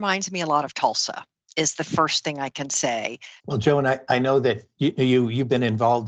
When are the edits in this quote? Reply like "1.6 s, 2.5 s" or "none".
3.4 s